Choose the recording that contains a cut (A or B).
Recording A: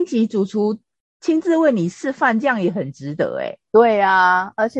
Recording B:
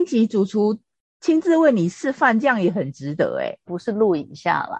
B